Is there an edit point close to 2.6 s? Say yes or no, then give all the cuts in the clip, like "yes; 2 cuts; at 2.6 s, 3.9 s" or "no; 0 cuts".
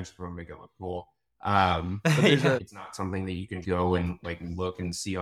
yes; 2 cuts; at 2.6 s, 3.6 s